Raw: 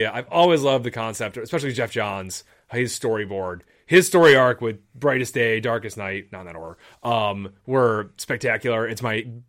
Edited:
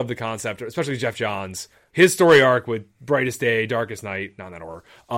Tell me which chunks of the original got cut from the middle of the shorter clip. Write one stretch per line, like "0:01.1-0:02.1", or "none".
0:02.7-0:03.8